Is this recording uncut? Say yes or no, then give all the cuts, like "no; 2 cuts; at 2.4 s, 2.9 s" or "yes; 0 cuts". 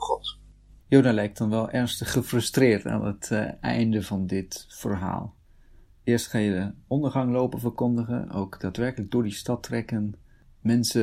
yes; 0 cuts